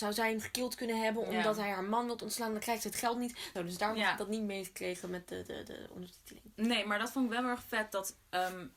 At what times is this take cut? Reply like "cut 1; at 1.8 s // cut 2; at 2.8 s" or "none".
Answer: cut 1; at 3.6 s